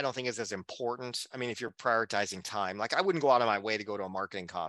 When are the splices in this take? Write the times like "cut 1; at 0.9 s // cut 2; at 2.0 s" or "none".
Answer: none